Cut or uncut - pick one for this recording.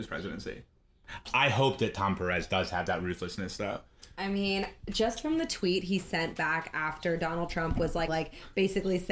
cut